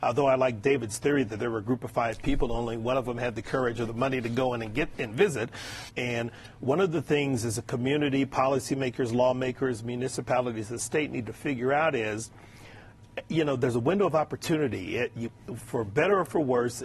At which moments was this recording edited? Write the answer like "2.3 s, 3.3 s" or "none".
5.9 s